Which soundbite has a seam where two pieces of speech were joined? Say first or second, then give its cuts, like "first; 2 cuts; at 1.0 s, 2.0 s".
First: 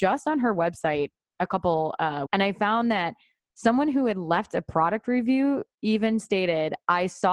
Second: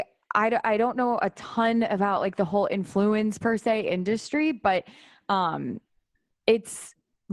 first; 1 cut; at 2.3 s